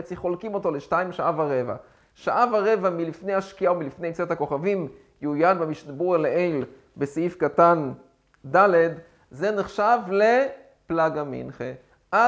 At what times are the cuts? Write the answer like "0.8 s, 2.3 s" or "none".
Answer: none